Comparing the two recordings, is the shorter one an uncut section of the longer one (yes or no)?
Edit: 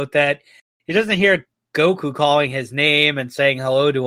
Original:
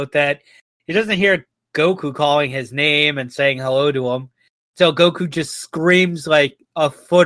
yes